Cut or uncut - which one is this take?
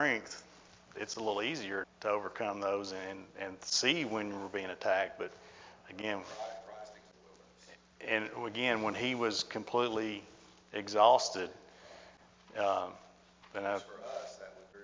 cut